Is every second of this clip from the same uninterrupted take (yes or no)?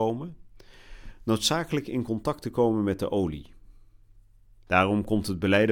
no